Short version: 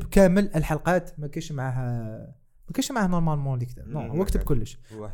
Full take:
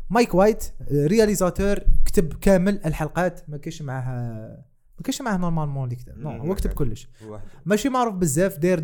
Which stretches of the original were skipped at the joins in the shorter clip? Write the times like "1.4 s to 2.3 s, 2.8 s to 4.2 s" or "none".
none